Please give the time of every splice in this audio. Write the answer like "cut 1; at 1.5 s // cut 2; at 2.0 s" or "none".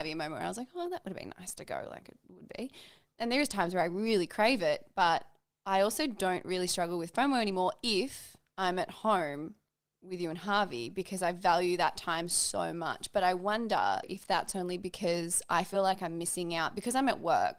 none